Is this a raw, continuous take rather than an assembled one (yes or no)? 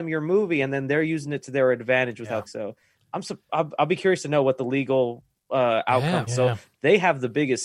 no